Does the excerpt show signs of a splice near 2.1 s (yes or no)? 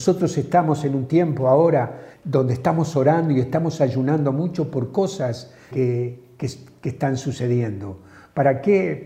yes